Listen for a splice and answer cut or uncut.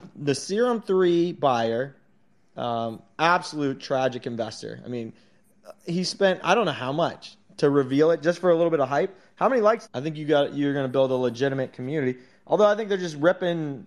cut